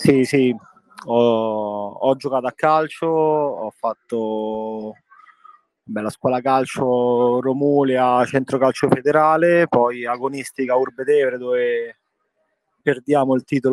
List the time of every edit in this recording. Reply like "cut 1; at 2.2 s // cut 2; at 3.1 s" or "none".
none